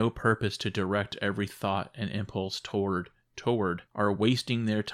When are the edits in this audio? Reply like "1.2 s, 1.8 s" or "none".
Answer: 3.9 s